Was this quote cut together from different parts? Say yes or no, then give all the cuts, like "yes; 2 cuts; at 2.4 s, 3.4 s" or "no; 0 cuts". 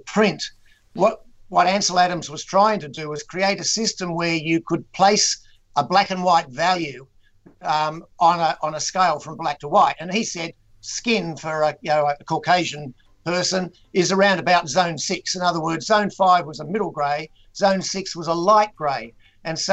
no; 0 cuts